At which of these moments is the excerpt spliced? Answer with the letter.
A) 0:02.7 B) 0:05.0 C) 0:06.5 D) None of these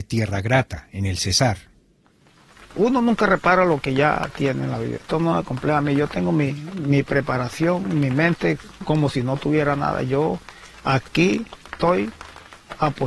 B